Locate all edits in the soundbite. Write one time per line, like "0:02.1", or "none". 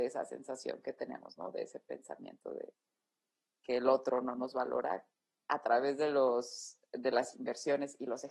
none